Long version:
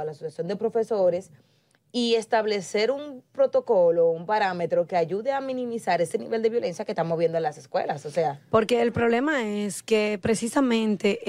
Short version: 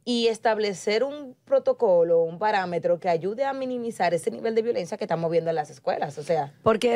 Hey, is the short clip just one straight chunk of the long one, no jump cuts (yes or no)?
yes